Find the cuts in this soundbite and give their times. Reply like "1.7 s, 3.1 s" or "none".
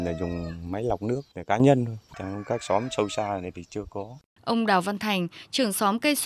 2.1 s, 4.4 s